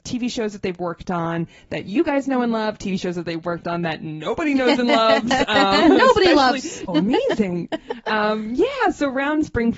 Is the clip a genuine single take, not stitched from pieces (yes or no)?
no